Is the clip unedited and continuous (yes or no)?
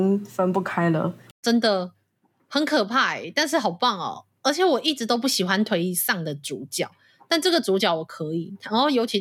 yes